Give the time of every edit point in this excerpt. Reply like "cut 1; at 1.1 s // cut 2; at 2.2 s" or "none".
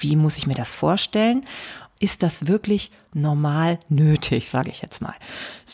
cut 1; at 2.0 s